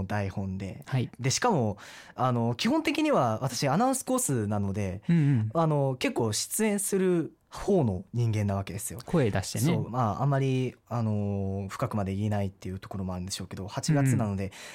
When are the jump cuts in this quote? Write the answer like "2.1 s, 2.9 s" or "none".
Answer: 9.9 s